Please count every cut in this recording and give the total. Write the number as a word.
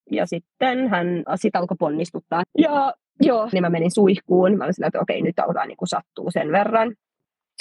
three